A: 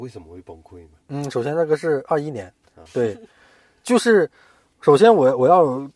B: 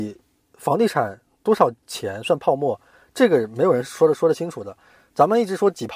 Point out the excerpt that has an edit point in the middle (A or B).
A